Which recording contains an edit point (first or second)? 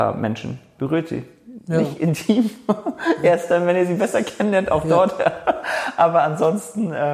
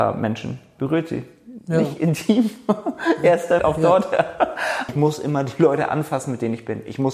second